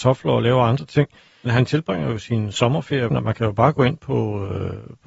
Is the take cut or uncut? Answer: cut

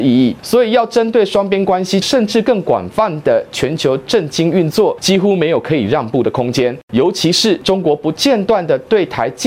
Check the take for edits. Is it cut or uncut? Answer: cut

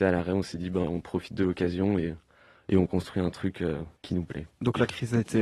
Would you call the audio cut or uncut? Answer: cut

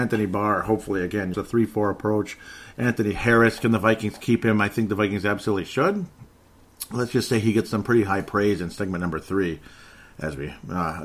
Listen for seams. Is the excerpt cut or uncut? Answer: cut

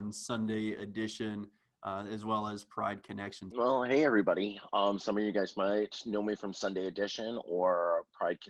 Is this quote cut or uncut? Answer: cut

